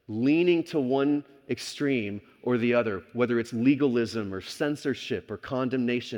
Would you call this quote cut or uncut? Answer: uncut